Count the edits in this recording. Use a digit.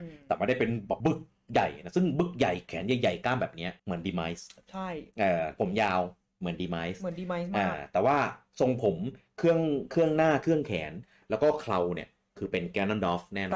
2